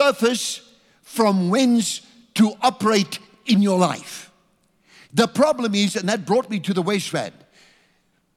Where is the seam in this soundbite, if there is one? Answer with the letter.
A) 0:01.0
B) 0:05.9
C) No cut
C